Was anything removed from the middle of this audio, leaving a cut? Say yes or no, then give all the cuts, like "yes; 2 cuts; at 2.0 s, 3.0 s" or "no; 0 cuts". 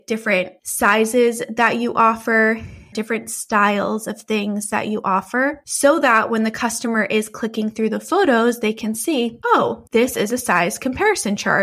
yes; 1 cut; at 2.9 s